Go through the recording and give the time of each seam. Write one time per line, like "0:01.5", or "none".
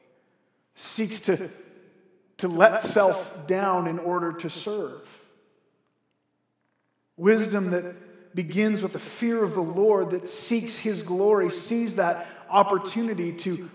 none